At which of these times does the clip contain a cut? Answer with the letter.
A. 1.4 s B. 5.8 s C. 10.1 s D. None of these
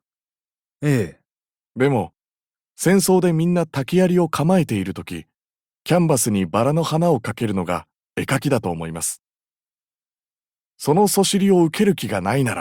B